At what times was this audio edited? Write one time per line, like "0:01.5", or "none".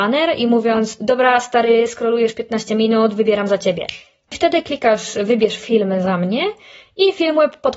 0:04.3